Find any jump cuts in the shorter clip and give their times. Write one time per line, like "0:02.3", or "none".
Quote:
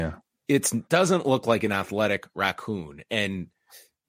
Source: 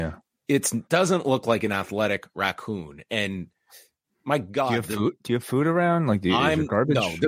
none